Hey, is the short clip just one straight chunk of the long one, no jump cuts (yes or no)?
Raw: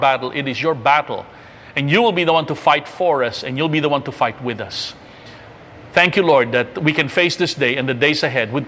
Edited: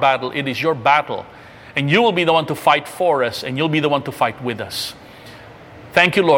yes